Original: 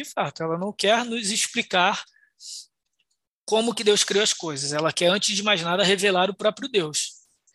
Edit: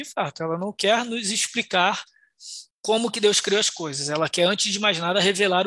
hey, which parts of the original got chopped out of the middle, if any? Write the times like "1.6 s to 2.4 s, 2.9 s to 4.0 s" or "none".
2.7 s to 3.3 s